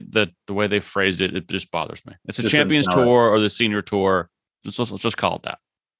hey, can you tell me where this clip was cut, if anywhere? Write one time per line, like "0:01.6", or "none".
none